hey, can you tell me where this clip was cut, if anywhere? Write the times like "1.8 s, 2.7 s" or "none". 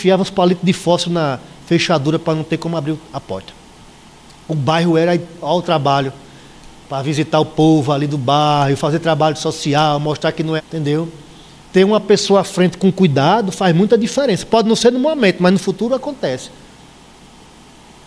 10.6 s